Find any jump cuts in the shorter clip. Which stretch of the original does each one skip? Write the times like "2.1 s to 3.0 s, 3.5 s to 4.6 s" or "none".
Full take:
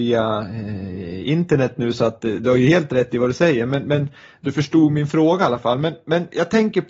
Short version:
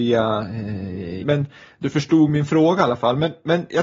1.2 s to 3.8 s